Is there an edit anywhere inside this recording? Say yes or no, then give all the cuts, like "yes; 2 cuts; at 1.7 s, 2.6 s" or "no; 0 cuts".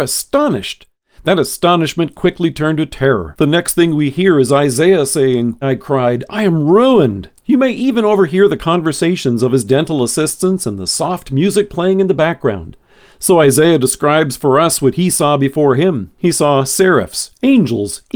yes; 2 cuts; at 5.6 s, 7.3 s